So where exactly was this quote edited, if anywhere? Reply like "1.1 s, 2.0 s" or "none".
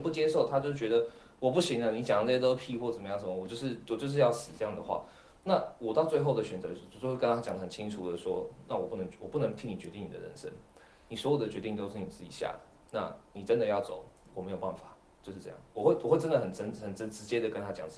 none